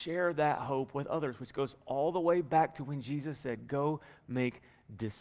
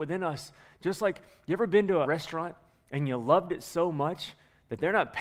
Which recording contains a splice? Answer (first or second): second